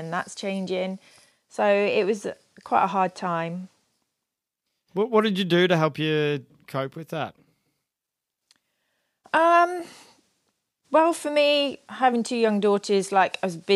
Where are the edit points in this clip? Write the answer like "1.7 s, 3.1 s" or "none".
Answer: none